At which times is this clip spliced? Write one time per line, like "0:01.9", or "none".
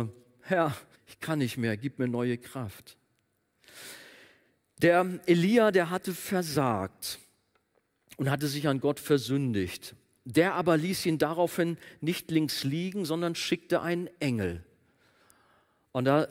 0:00.9